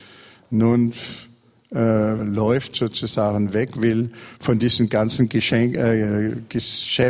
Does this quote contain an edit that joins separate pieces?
yes; 1 cut; at 2.2 s

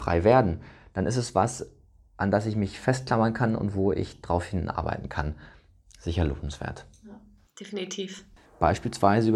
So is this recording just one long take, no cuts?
no; 1 cut; at 8.5 s

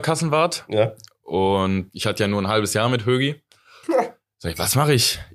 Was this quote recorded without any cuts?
no; 2 cuts; at 1.9 s, 3.8 s

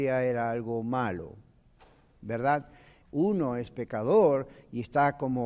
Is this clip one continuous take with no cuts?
no; 1 cut; at 3.0 s

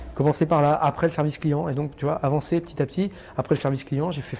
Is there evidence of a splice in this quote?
no; 0 cuts

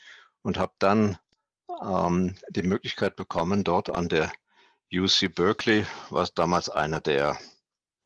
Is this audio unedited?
yes; 0 cuts

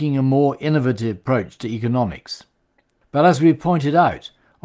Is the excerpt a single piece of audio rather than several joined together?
no; 1 cut; at 3.0 s

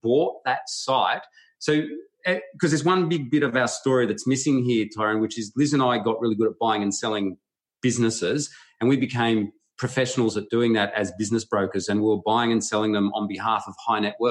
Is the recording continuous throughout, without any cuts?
yes; 0 cuts

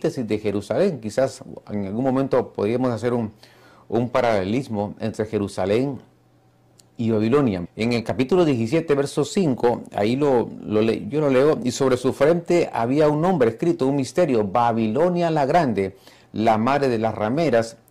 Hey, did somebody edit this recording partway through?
yes; 1 cut; at 7.6 s

